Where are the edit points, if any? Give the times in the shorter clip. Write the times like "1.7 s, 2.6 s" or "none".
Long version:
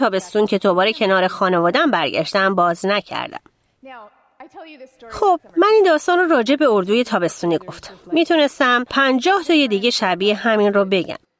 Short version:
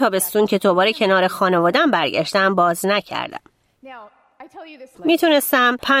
4.9 s

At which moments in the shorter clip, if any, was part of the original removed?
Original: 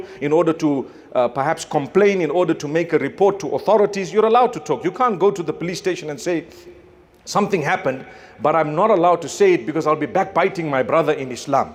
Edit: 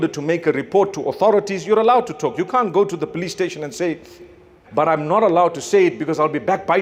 4.6 s

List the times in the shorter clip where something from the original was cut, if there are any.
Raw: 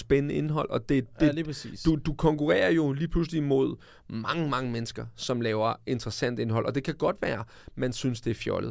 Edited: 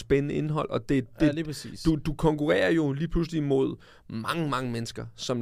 none

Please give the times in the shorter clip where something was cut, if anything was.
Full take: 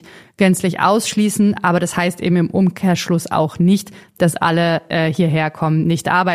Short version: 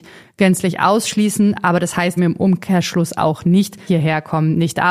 2.2 s, 3.9 s

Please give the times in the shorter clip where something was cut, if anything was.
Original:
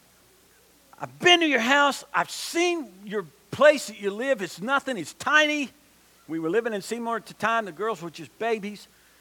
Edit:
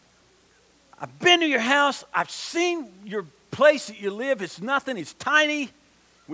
none

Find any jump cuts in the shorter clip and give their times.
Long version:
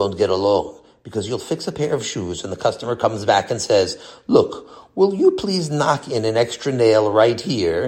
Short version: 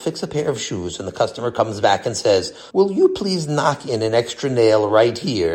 2.7 s

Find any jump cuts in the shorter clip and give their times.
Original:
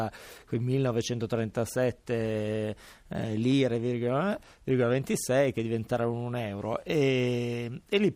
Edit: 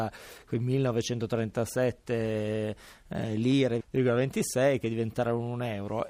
3.8 s

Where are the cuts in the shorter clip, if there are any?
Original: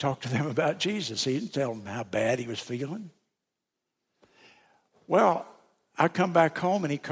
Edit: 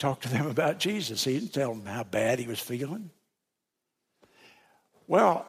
none

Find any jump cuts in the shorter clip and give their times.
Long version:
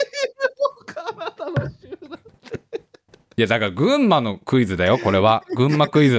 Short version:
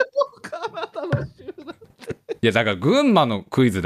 2.4 s

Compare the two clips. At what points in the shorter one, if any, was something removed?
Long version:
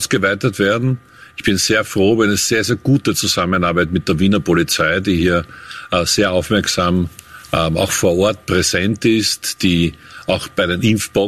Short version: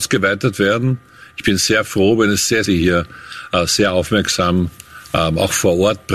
2.6 s

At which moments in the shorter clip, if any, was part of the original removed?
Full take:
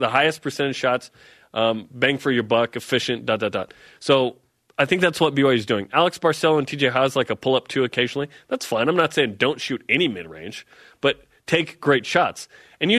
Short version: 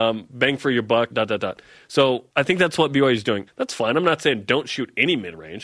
1.1 s, 2.3 s, 3.5 s

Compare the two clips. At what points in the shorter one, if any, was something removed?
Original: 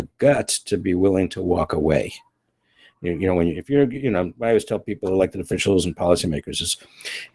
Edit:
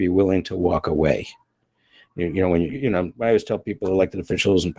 2.7 s

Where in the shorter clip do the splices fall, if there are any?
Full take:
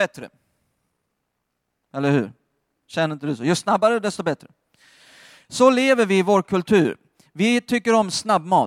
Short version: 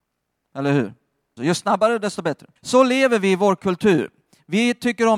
1.4 s, 2.6 s

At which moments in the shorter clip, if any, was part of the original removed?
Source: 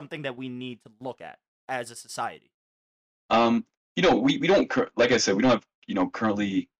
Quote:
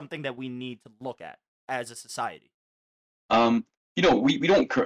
none

